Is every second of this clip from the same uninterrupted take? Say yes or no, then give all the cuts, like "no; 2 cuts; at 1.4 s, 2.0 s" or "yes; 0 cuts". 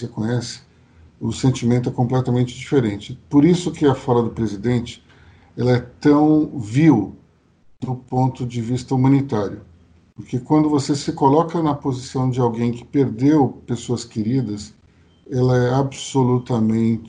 yes; 0 cuts